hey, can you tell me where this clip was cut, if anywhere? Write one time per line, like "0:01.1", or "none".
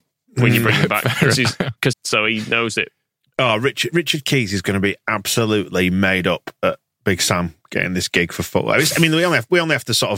0:01.9